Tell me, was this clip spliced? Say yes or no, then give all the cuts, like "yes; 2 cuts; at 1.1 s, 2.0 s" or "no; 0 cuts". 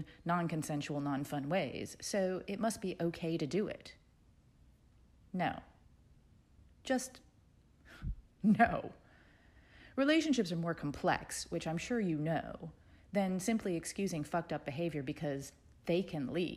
no; 0 cuts